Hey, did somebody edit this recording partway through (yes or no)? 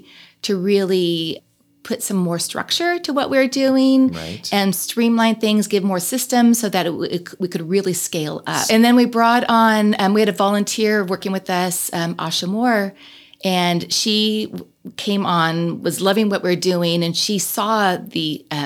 yes